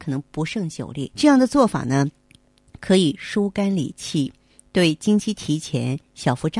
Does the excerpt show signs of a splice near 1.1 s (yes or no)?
yes